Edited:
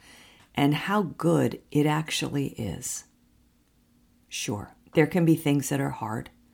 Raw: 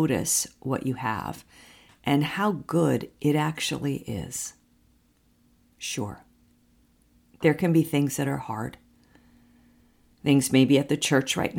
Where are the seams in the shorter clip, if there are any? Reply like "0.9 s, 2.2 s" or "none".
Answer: 4.9 s